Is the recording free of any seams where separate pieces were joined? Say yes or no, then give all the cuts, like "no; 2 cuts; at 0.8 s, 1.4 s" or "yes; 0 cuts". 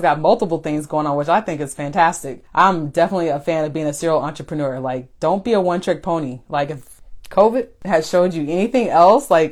yes; 0 cuts